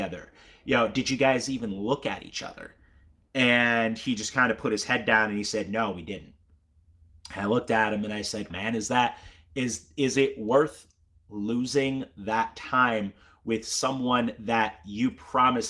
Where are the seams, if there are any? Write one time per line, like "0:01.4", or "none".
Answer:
0:08.5